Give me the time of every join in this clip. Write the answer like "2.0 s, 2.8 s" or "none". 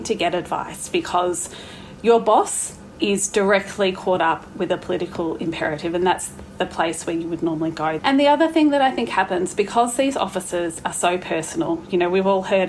8.0 s

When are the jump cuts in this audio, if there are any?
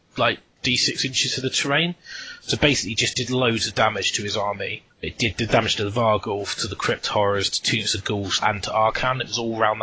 4.9 s, 8.4 s

